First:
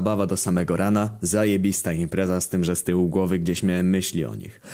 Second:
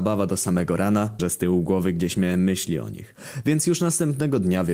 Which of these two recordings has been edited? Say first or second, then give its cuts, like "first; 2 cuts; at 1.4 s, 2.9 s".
second; 1 cut; at 1.2 s